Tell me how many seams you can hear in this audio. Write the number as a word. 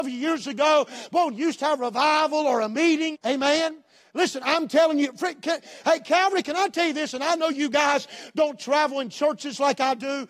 one